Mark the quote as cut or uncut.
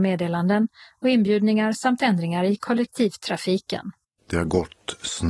cut